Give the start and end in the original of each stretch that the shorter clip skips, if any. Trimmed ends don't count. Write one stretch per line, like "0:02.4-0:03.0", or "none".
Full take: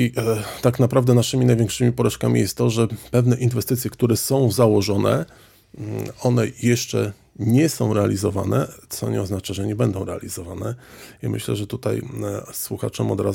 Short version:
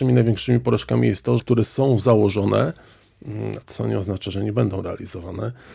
0:02.7-0:03.9
0:06.1-0:08.8

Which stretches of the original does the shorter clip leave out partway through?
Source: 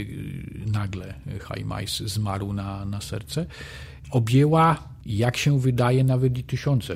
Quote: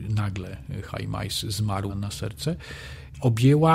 0:02.5-0:02.8

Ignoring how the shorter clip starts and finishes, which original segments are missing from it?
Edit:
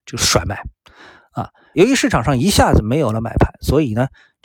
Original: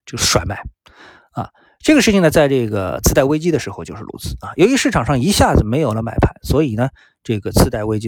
0:01.7-0:04.5

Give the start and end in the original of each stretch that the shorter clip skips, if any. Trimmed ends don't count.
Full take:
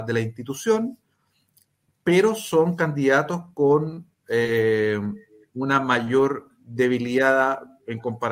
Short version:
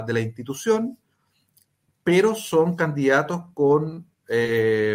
none

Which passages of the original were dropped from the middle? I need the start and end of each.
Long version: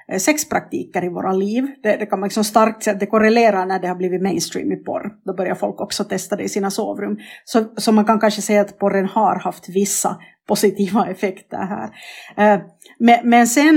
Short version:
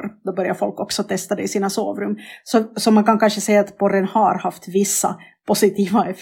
none

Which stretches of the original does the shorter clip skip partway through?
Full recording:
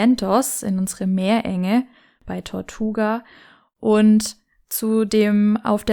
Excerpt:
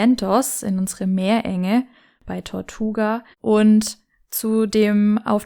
0:03.3-0:03.7

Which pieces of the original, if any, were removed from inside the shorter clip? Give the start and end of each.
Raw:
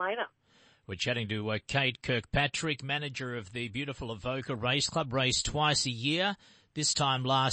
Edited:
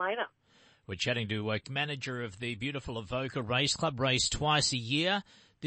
0:01.6-0:02.8

